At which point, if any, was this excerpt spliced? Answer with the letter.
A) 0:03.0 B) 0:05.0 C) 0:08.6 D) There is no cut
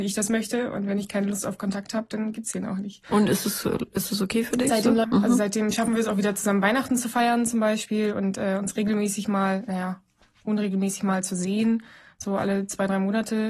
B